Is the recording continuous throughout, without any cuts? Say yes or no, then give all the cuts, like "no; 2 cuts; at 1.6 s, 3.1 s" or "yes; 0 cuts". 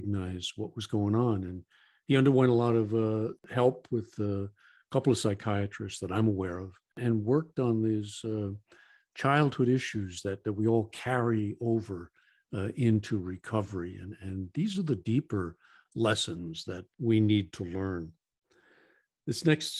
yes; 0 cuts